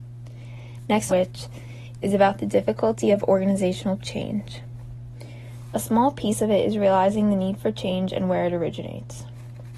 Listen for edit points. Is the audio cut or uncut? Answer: cut